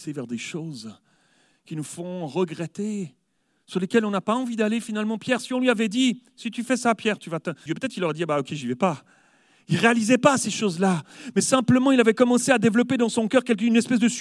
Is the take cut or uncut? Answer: cut